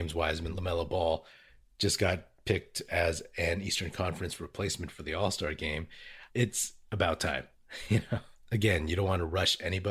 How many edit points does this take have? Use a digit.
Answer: 0